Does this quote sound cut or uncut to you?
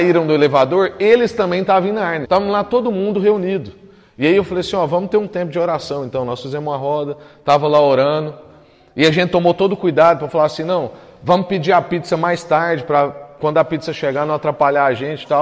cut